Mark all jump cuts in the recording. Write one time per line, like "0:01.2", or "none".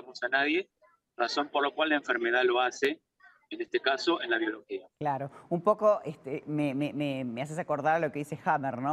0:04.9